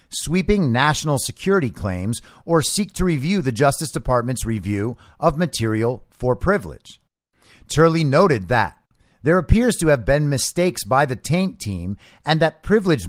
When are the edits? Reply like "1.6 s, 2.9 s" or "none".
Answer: none